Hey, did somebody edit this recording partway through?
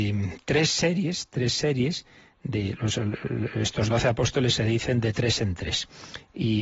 no; 0 cuts

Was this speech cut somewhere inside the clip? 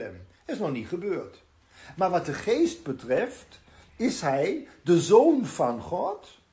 no; 0 cuts

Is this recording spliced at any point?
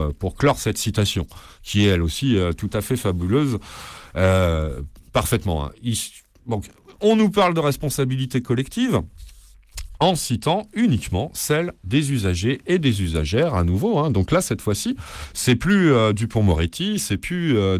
no; 0 cuts

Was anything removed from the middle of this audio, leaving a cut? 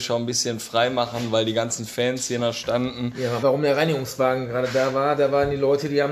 yes; 1 cut; at 3.4 s

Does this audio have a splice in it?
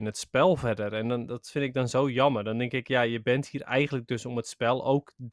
no; 0 cuts

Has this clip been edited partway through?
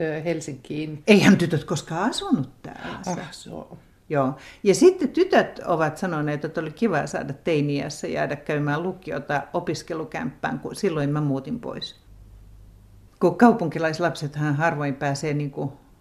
yes; 1 cut; at 3.0 s

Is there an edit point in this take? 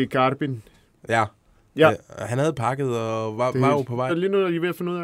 yes; 1 cut; at 4.1 s

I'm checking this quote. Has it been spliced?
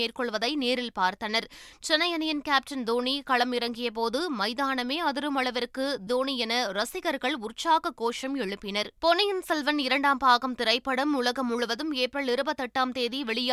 yes; 2 cuts; at 6.1 s, 9.0 s

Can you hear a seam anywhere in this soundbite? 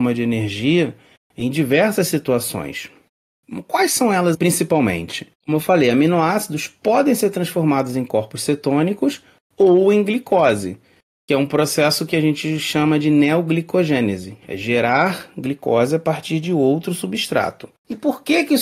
yes; 1 cut; at 4.3 s

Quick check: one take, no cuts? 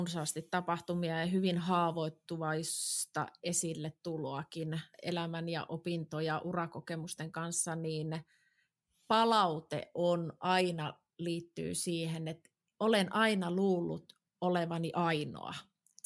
no; 1 cut; at 4.9 s

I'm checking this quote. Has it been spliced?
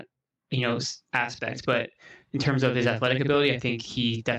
no; 0 cuts

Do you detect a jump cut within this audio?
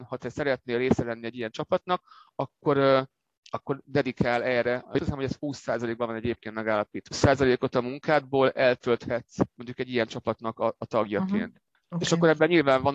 yes; 1 cut; at 7.1 s

